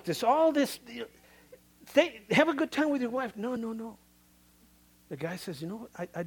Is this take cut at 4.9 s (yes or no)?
no